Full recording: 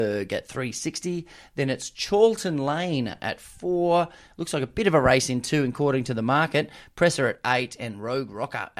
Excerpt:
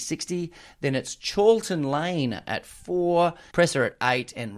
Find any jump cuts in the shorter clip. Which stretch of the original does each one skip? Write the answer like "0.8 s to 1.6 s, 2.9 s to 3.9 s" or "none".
4.3 s to 6.9 s